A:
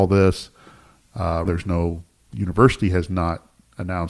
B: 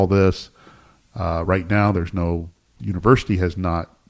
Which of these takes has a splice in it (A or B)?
A